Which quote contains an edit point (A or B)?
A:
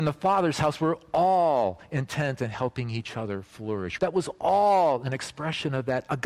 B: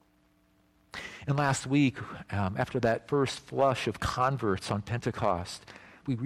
A